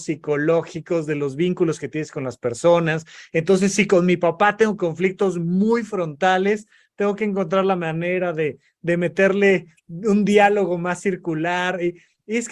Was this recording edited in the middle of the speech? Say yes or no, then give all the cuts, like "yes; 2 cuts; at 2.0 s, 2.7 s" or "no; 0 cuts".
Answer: no; 0 cuts